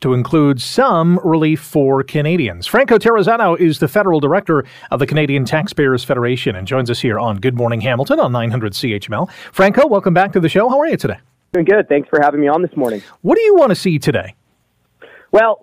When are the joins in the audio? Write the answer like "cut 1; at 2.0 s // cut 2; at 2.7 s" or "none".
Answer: none